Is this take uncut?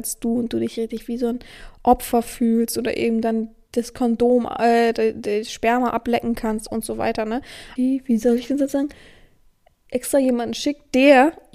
no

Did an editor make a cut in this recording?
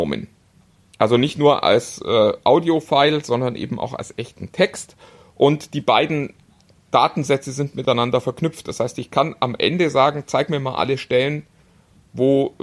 no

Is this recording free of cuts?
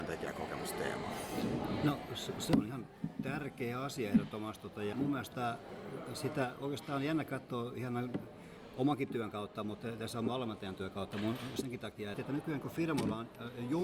no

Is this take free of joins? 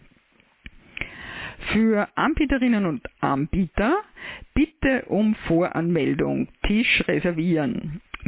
yes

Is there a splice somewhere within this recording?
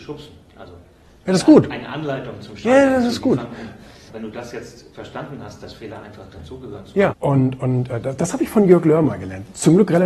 yes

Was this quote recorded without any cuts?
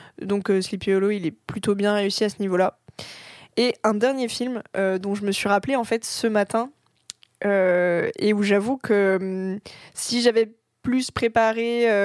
yes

